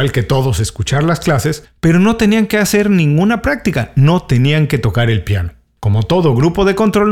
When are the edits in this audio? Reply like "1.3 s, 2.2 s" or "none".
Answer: none